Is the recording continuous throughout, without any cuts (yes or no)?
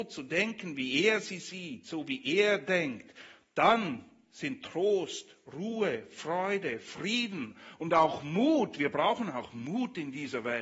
yes